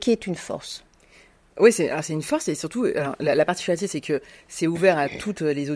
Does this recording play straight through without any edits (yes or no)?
yes